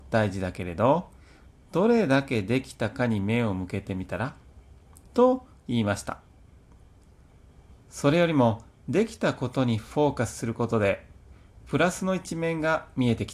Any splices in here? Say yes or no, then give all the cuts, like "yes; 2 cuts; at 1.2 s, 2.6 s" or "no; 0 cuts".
yes; 1 cut; at 7.7 s